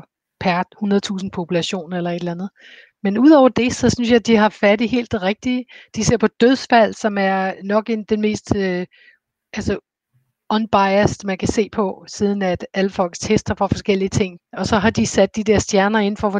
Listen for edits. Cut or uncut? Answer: cut